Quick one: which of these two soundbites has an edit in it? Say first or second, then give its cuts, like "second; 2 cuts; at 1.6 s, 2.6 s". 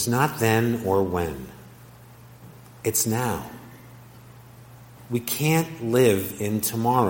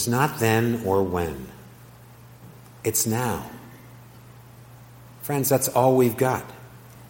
first; 1 cut; at 5.0 s